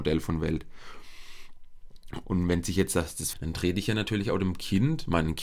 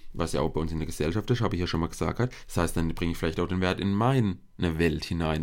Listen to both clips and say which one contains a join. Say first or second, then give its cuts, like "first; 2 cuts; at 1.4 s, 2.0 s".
first; 2 cuts; at 2.2 s, 3.3 s